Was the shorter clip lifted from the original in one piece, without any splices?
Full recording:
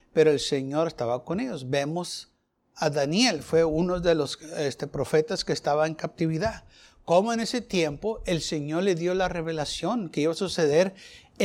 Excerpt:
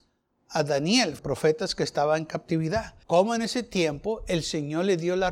no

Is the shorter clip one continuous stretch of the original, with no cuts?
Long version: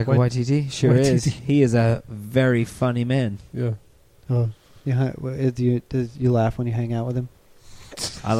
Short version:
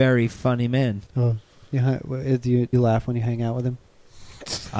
no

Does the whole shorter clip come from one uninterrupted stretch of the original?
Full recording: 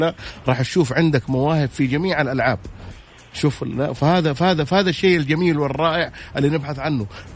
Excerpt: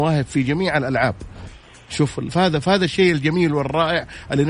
no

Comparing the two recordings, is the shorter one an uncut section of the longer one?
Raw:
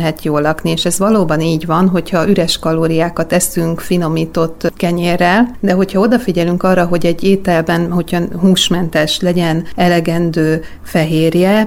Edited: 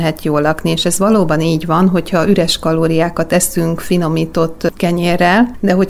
yes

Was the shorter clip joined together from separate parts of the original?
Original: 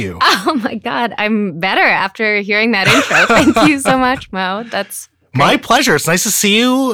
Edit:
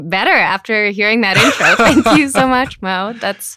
no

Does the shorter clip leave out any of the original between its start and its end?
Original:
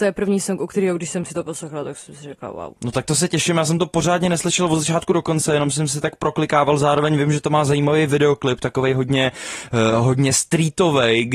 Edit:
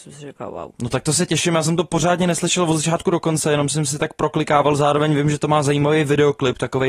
no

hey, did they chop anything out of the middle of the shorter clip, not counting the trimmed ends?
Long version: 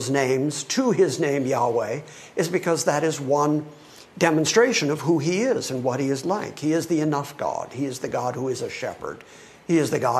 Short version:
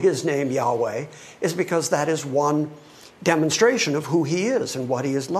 no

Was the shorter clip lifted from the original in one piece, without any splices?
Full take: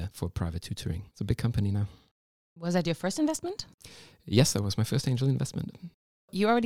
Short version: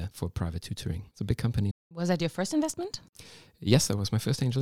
no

